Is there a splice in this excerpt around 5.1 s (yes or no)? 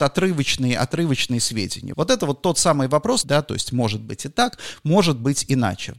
no